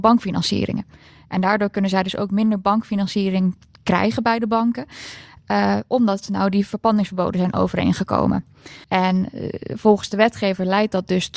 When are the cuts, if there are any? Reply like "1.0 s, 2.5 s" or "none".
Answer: 8.8 s